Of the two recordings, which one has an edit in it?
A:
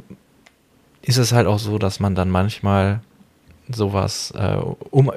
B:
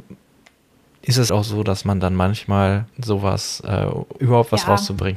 B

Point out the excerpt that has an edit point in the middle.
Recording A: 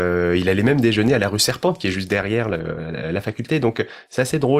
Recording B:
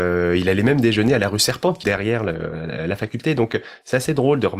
B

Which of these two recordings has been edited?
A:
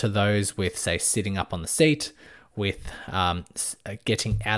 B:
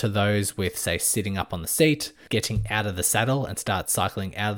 B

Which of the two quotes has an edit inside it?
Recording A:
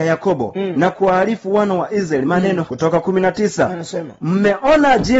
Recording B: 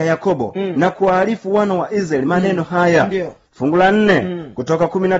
A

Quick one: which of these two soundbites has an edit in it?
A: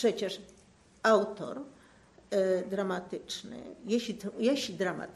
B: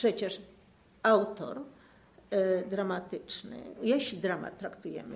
B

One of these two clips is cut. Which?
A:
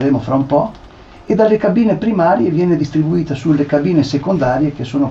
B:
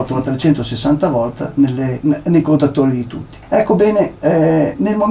B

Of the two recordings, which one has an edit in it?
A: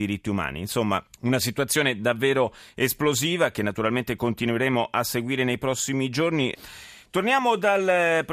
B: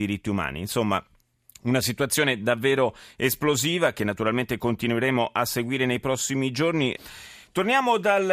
A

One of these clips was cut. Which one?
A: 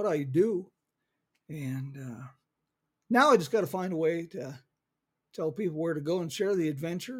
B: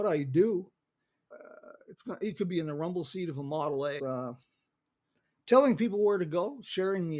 B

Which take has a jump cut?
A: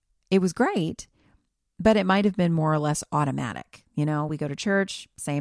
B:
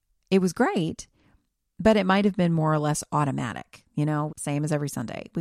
B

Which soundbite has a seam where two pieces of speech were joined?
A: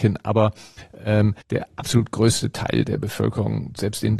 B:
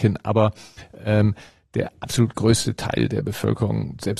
A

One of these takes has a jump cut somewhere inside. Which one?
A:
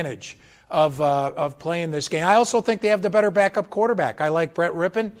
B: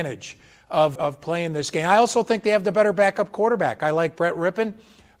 B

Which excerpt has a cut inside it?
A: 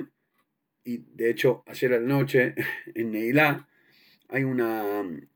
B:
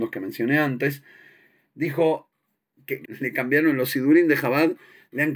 B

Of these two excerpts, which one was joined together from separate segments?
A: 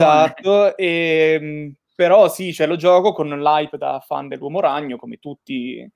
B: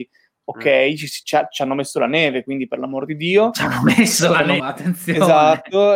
B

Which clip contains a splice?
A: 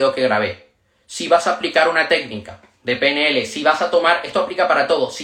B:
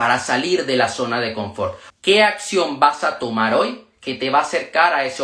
B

